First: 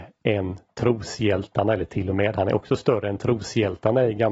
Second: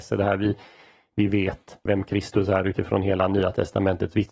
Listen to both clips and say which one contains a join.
second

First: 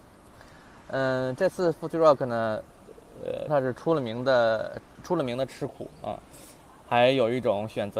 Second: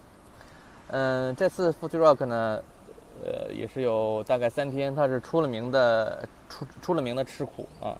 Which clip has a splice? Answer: first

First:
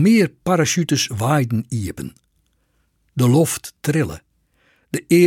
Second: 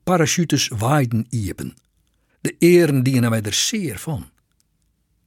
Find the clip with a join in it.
second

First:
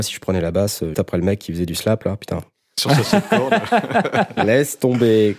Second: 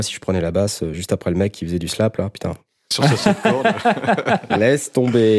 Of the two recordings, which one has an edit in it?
first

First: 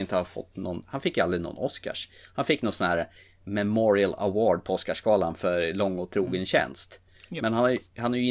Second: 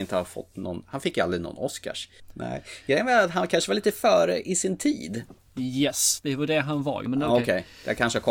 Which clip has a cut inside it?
second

